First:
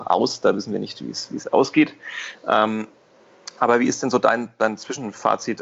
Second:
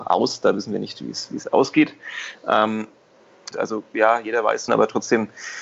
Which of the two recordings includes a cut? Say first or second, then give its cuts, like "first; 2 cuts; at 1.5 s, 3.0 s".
second; 2 cuts; at 3.5 s, 4.7 s